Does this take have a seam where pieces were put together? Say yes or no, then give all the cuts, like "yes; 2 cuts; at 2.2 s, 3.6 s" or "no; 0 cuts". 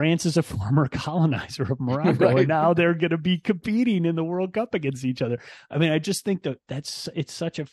no; 0 cuts